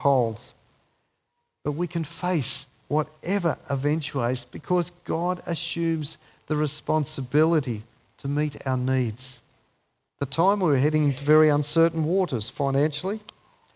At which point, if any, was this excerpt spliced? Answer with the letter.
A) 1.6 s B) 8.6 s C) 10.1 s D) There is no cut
C